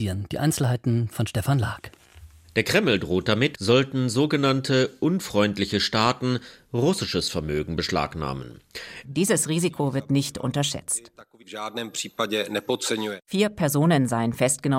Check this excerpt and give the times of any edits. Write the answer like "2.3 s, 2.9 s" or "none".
3.5 s, 9.0 s